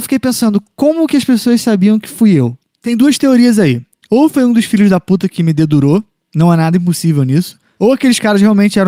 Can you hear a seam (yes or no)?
no